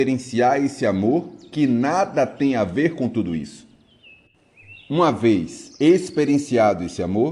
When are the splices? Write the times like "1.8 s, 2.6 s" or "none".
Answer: 5.8 s